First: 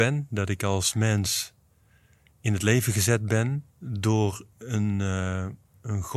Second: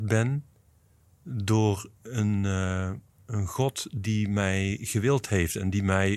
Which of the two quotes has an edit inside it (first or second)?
first